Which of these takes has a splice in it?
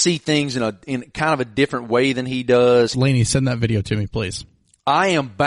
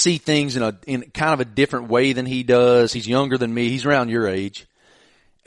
first; 1 cut; at 2.9 s

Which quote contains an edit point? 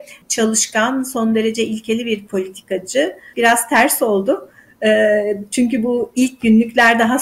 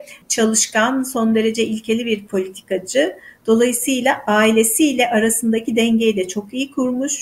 first; 1 cut; at 3.3 s

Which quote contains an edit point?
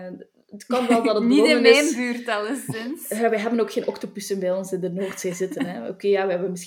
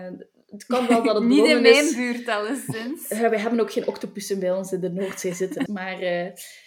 second; 1 cut; at 5.7 s

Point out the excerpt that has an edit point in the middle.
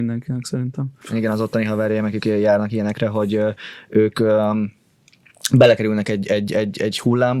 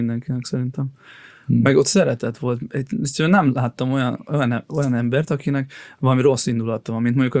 first; 1 cut; at 1.0 s

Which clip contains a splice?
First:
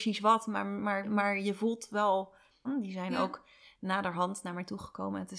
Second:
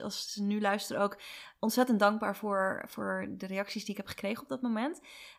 first; 2 cuts; at 1.0 s, 2.6 s

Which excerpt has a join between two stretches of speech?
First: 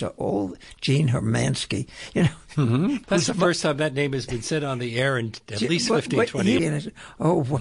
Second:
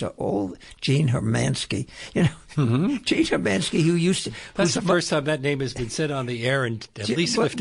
first; 2 cuts; at 3.0 s, 6.6 s

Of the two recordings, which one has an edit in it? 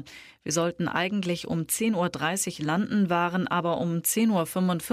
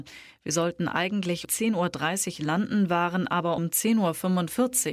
second; 2 cuts; at 1.4 s, 3.6 s

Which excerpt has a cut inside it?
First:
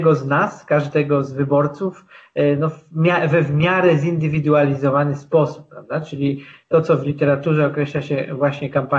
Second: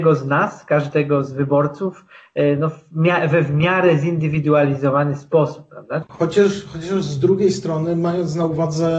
second; 1 cut; at 6.0 s

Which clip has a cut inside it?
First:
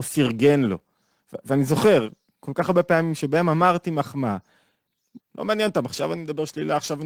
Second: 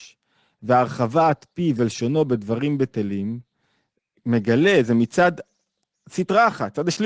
first; 1 cut; at 5.2 s

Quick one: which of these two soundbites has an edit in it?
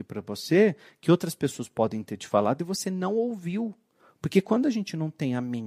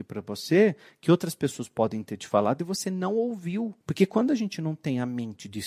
second; 1 cut; at 3.8 s

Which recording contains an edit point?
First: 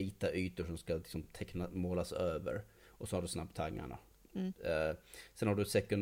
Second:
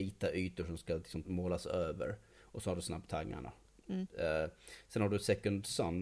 second; 1 cut; at 1.2 s

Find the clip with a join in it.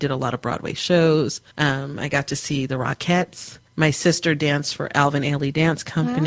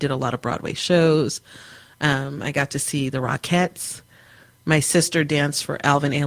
first; 2 cuts; at 1.5 s, 3.7 s

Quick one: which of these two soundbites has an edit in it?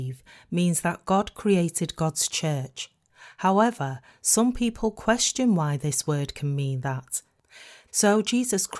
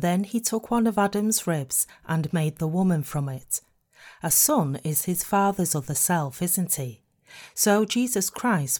first; 1 cut; at 7.9 s

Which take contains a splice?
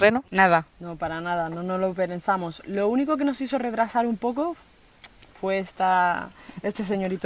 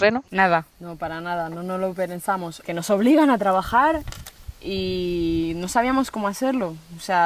second; 2 cuts; at 2.6 s, 4.5 s

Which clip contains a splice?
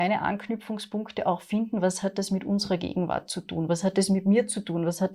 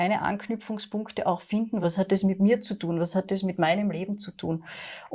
second; 1 cut; at 1.8 s

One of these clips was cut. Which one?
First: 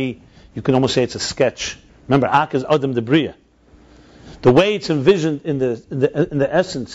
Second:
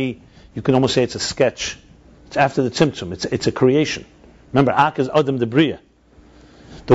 first; 1 cut; at 1.9 s

